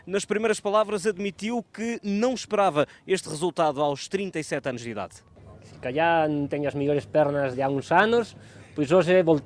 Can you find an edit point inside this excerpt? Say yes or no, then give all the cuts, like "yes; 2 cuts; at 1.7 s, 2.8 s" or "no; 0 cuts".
yes; 1 cut; at 7.5 s